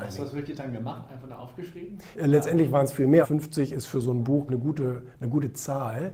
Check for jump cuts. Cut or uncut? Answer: cut